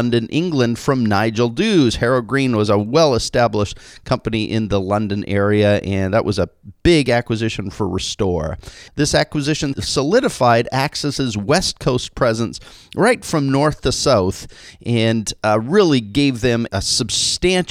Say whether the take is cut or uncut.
cut